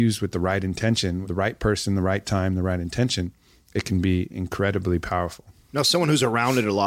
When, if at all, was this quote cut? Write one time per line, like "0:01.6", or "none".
0:01.2